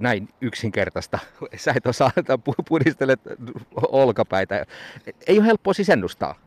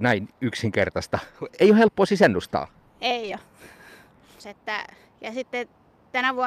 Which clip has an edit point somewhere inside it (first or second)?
second